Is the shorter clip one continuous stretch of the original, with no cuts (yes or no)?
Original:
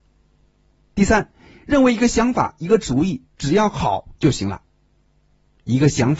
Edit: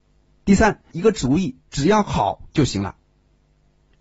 no